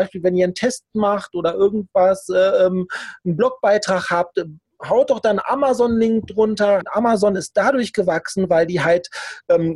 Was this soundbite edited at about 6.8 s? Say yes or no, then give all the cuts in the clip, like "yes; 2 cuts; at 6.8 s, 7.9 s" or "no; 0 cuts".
yes; 1 cut; at 6.8 s